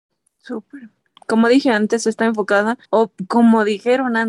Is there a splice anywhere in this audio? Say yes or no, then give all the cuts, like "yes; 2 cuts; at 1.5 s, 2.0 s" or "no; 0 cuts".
yes; 2 cuts; at 1.2 s, 2.9 s